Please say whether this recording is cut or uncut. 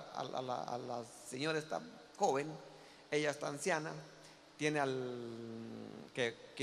uncut